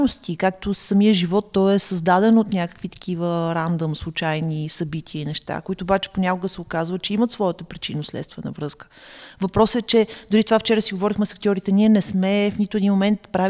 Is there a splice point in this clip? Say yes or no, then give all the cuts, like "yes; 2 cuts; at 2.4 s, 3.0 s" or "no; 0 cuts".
no; 0 cuts